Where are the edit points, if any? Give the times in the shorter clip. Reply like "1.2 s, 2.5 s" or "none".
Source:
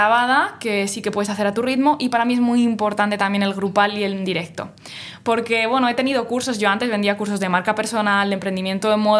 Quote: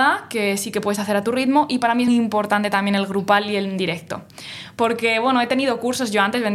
2.1 s